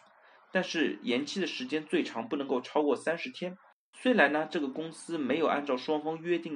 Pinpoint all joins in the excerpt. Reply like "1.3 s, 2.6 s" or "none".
3.9 s